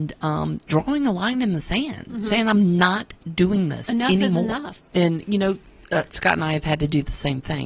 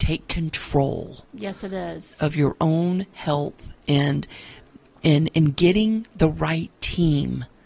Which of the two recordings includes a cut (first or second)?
first